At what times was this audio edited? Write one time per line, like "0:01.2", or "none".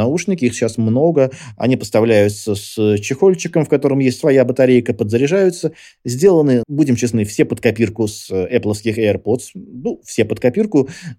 0:06.6